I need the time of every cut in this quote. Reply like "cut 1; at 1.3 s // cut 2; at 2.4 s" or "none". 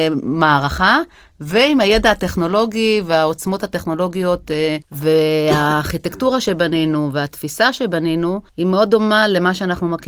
cut 1; at 4.8 s // cut 2; at 8.5 s